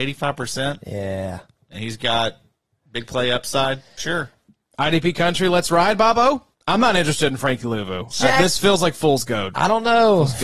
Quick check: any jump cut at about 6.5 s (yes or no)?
yes